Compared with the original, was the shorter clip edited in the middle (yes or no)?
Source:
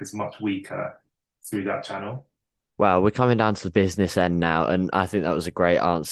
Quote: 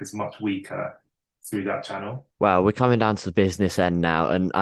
yes